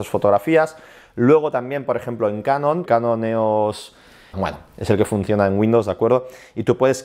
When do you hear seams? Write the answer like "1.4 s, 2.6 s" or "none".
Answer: 2.9 s, 4.3 s